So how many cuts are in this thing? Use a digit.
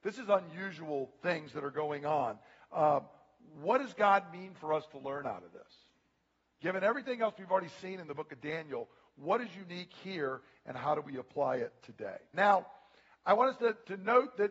1